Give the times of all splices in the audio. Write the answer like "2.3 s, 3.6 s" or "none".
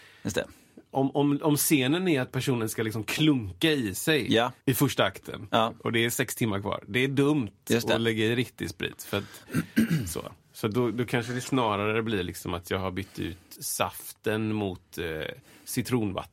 4.6 s, 13.6 s